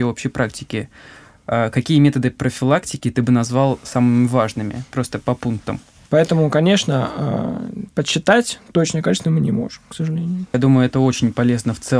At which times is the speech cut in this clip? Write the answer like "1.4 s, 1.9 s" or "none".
6.0 s, 10.5 s